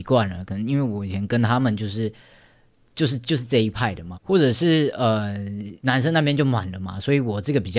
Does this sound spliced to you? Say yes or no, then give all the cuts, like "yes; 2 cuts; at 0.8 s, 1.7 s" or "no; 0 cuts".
yes; 2 cuts; at 4.1 s, 5.8 s